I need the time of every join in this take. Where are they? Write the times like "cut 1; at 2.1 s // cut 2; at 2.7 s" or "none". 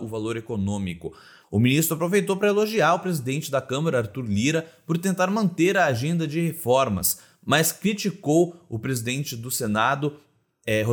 cut 1; at 1.4 s